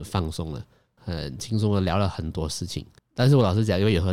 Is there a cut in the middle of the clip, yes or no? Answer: no